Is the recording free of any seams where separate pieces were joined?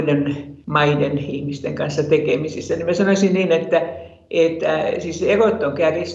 yes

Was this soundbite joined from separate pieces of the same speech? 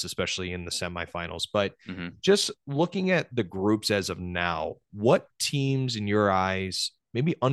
no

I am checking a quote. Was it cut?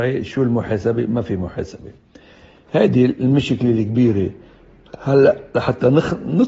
no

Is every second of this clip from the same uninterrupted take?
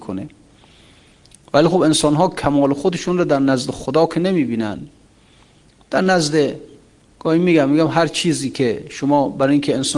yes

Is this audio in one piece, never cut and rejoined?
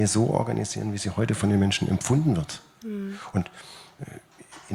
yes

